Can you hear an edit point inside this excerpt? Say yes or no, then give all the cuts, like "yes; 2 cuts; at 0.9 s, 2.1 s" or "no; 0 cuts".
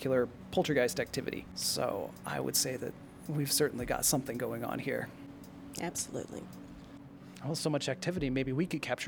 no; 0 cuts